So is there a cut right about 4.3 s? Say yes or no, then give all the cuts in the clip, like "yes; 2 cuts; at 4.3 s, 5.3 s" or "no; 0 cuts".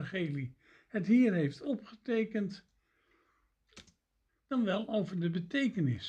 yes; 1 cut; at 4.3 s